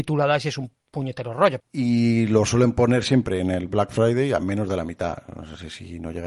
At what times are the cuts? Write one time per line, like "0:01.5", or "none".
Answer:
0:01.6